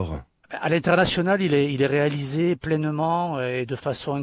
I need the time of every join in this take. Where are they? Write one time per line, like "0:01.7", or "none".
none